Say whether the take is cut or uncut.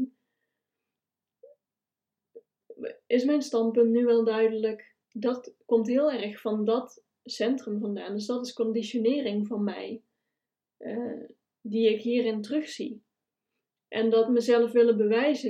cut